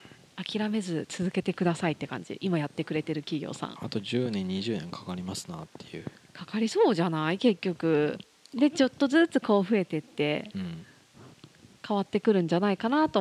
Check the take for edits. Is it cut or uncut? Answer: uncut